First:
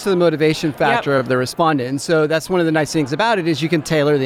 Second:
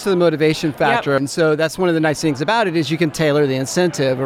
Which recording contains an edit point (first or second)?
second